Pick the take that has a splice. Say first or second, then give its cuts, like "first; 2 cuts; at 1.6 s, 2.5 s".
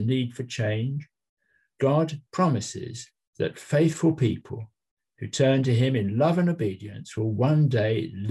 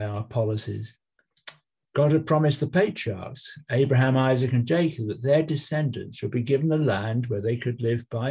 second; 1 cut; at 1.8 s